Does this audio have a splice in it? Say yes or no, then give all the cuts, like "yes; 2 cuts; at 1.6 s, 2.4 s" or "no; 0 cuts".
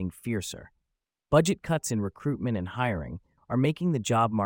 yes; 1 cut; at 3.4 s